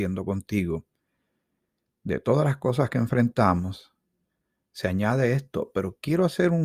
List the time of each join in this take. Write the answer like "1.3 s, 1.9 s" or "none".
none